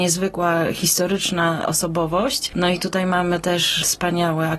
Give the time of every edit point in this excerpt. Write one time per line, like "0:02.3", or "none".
none